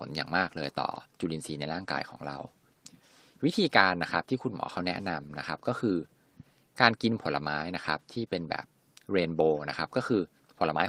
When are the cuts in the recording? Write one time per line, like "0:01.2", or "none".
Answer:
none